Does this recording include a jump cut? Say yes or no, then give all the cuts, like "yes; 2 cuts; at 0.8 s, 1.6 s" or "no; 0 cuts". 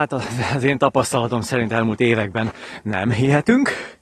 no; 0 cuts